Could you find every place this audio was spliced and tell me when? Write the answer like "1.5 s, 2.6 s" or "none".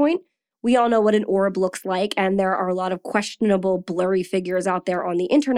none